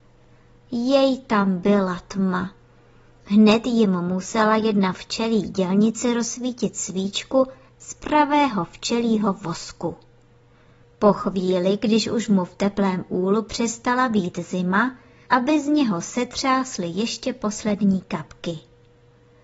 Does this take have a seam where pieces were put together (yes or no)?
yes